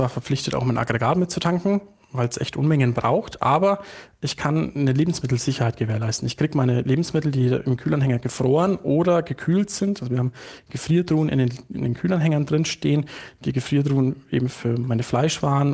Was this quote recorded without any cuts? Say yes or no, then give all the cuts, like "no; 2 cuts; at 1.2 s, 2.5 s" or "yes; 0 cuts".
yes; 0 cuts